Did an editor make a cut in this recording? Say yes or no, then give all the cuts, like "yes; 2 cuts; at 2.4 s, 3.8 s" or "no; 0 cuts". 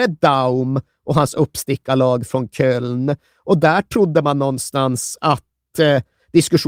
no; 0 cuts